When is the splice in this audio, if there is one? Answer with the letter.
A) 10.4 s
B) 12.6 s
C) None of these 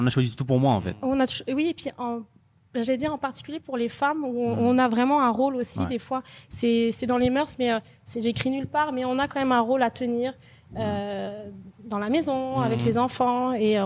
C